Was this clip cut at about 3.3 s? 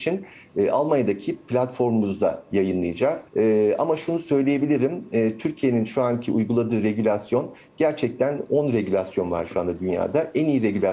yes; 1 cut; at 3.3 s

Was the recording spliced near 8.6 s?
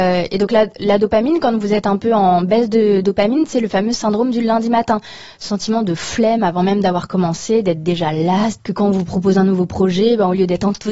yes; 1 cut; at 8.6 s

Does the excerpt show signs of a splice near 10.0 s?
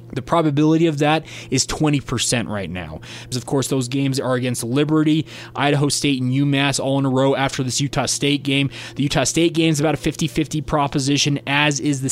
no; 1 cut; at 3.3 s

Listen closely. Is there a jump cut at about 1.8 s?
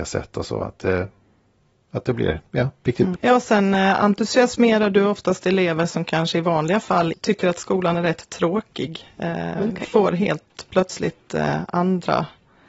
no; 1 cut; at 3.1 s

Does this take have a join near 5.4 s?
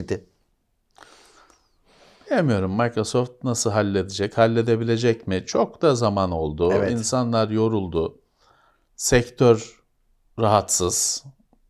no; 0 cuts

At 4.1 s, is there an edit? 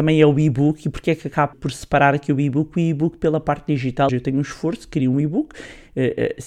yes; 2 cuts; at 1.5 s, 4.1 s

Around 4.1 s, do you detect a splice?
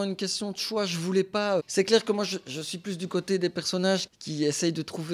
yes; 2 cuts; at 1.6 s, 4.1 s

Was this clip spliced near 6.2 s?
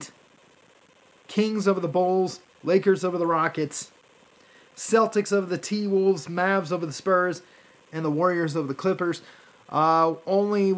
no; 0 cuts

